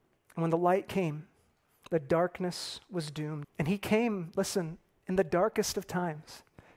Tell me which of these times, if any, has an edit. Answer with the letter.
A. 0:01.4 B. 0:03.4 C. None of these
B